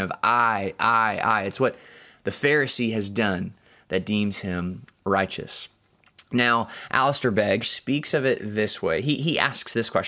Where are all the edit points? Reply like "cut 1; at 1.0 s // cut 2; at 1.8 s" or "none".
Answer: cut 1; at 7.6 s